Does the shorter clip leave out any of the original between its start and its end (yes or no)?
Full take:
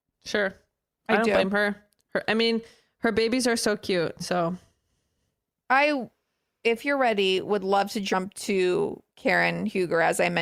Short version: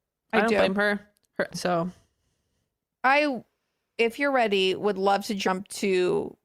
yes